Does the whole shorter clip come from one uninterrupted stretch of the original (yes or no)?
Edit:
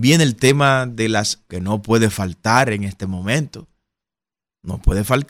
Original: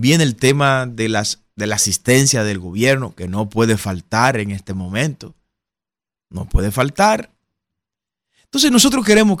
no